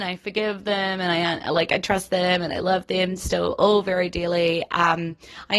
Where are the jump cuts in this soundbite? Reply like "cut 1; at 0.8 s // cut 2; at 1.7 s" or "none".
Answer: none